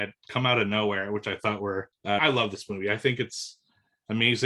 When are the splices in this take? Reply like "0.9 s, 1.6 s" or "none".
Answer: 2.2 s